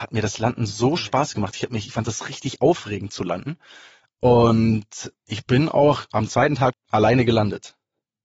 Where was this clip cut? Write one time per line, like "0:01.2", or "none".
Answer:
0:05.1
0:06.7